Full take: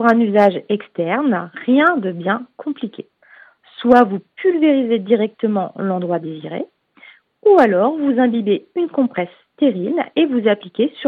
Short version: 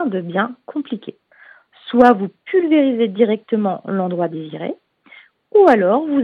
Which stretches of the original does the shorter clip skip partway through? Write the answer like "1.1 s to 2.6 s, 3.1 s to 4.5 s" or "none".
none